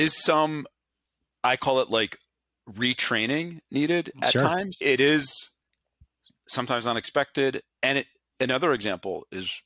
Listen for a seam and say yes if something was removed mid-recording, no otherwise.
yes